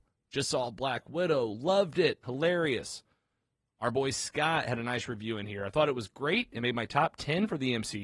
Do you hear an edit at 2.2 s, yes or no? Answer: yes